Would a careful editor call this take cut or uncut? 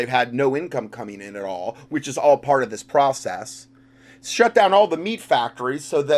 uncut